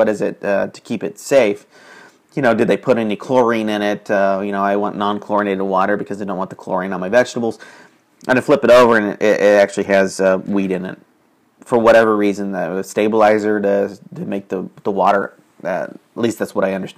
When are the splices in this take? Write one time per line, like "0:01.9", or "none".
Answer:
none